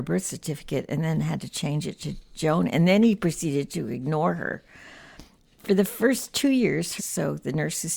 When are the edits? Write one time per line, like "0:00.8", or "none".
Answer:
0:07.0